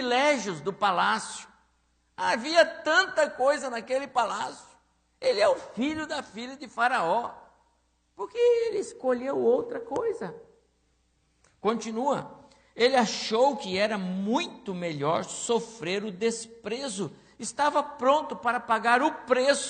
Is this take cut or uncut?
uncut